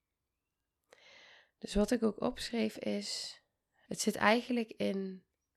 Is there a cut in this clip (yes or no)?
yes